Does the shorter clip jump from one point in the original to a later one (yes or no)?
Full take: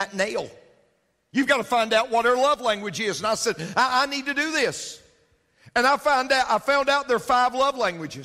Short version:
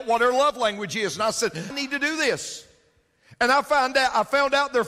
yes